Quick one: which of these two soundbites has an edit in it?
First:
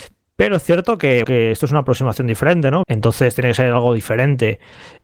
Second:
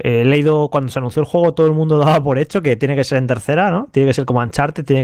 first; 2 cuts; at 1.2 s, 2.8 s

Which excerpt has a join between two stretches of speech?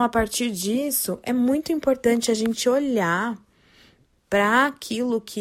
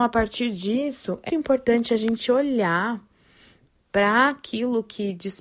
second; 1 cut; at 1.3 s

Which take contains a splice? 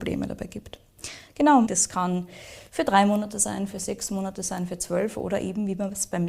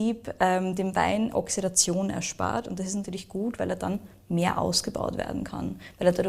first; 1 cut; at 1.7 s

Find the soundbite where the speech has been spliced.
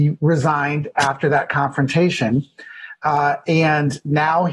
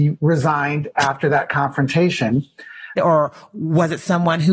second; 1 cut; at 3.0 s

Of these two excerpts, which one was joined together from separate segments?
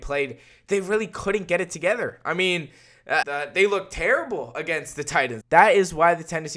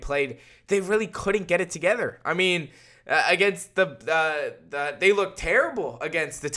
first; 2 cuts; at 3.2 s, 5.4 s

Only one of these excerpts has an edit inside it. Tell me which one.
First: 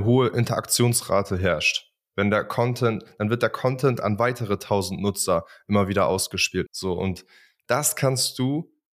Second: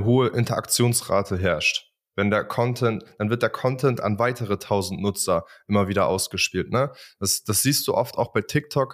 first; 1 cut; at 6.7 s

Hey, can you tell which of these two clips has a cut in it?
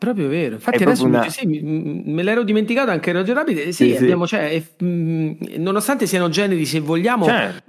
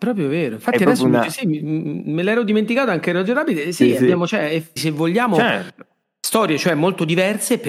second; 1 cut; at 4.8 s

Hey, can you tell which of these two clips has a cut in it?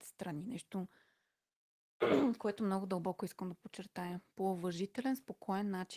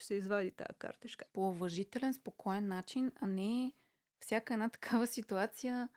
second; 1 cut; at 1.3 s

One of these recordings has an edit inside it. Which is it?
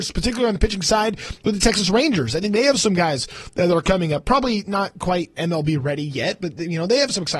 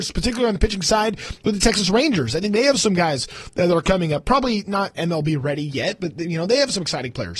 second; 1 cut; at 4.9 s

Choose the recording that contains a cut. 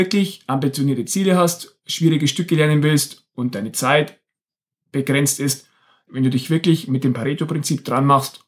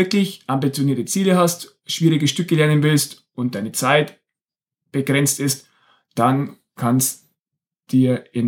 first; 1 cut; at 6.1 s

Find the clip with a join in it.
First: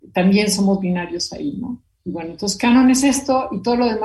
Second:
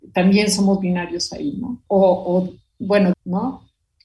second; 2 cuts; at 1.9 s, 3.1 s

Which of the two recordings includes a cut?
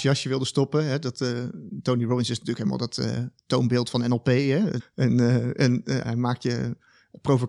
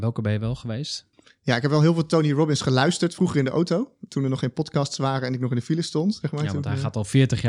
first; 2 cuts; at 4.8 s, 6.0 s

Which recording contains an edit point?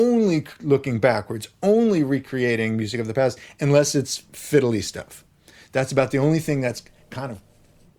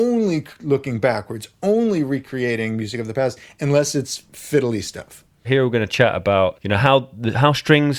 second; 2 cuts; at 5.4 s, 6.5 s

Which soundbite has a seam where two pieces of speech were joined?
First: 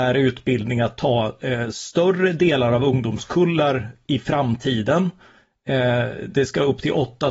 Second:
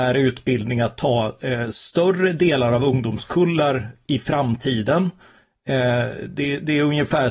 first; 1 cut; at 6.3 s

